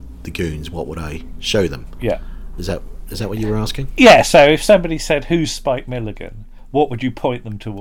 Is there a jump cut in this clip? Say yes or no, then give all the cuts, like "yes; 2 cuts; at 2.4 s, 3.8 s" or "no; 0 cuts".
no; 0 cuts